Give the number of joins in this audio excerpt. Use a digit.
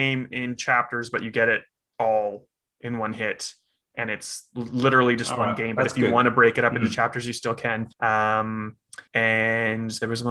2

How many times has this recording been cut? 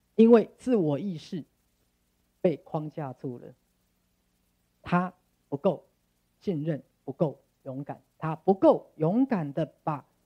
1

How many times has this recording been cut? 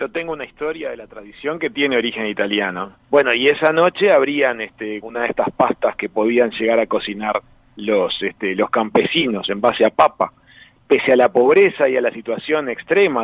3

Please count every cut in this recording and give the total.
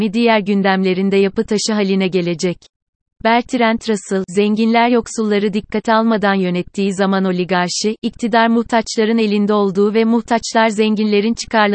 1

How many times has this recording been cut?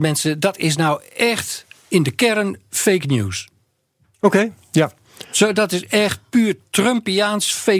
0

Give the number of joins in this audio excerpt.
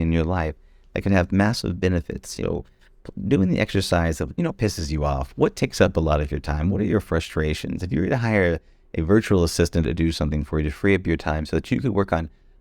0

